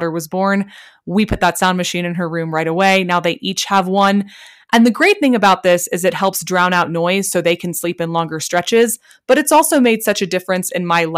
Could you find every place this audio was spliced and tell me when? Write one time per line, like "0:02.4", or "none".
none

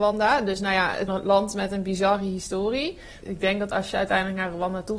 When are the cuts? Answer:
0:01.1
0:03.2

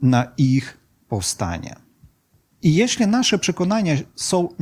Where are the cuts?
0:02.5

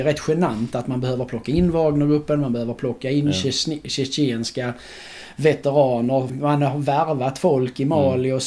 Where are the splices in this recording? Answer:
0:06.3

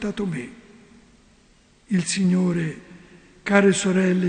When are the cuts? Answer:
none

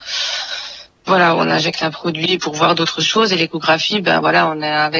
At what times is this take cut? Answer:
none

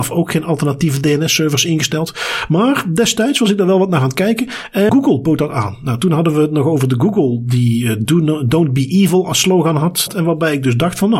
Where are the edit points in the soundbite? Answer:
0:04.9
0:10.1

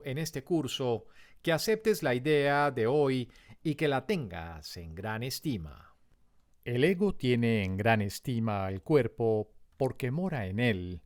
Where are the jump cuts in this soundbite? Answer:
0:06.5

